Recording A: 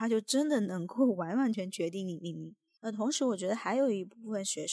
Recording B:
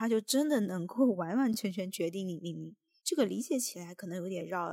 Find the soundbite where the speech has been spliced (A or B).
A